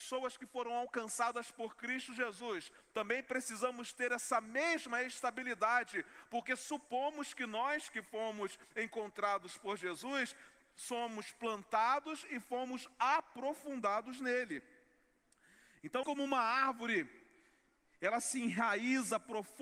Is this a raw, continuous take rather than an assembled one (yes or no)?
no